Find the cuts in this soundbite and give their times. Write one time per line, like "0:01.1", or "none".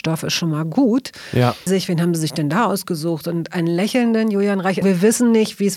0:01.7
0:04.8